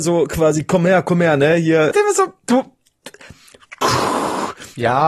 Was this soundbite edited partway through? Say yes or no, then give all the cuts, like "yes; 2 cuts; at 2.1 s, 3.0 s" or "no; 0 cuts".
yes; 1 cut; at 1.9 s